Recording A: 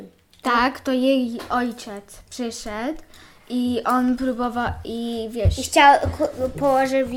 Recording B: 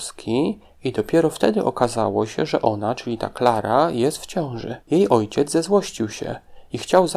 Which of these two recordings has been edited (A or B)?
B